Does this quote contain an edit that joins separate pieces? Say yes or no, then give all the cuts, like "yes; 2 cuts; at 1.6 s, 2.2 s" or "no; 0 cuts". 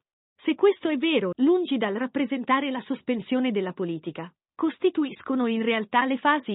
yes; 1 cut; at 1.3 s